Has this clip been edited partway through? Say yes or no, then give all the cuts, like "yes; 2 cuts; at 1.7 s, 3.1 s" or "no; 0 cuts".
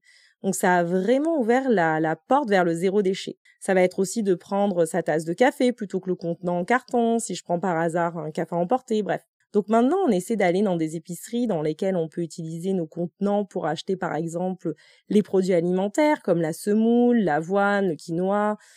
yes; 2 cuts; at 3.5 s, 9.4 s